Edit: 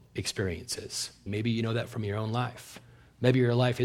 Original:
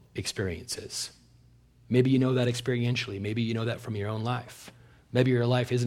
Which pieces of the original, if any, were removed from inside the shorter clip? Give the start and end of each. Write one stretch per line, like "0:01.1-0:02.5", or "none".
0:01.3-0:03.2